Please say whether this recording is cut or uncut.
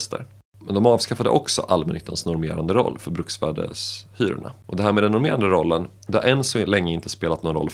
uncut